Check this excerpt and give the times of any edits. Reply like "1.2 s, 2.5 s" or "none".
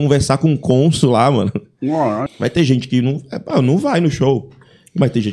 2.3 s